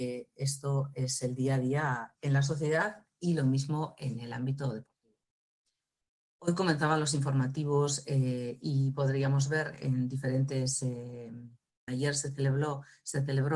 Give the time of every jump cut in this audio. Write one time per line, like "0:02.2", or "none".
0:02.2
0:11.9